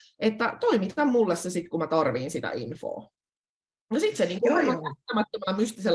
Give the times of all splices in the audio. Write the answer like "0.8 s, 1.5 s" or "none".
none